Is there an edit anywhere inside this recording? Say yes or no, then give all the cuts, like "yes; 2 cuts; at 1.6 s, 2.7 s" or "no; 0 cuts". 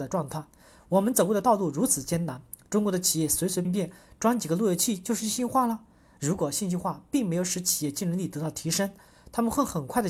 yes; 1 cut; at 3.6 s